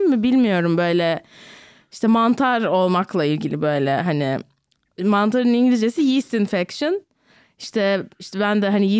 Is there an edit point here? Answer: no; 0 cuts

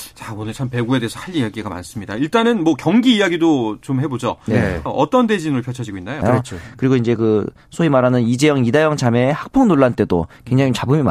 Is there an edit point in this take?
yes; 2 cuts; at 4.9 s, 6.2 s

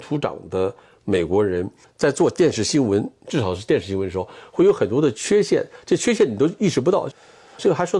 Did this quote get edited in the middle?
no; 0 cuts

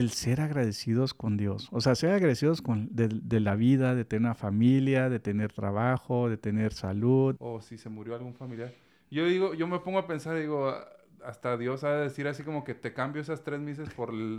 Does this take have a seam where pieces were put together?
yes; 1 cut; at 7.4 s

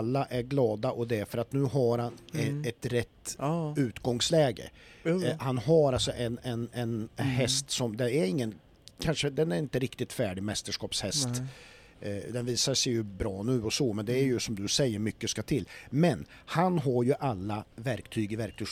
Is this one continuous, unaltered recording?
yes; 0 cuts

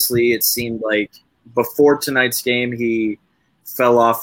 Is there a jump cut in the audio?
no; 0 cuts

